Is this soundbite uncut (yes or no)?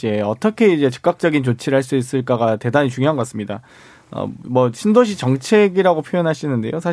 yes